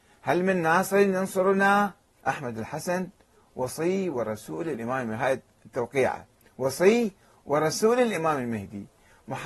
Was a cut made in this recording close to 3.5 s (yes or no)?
no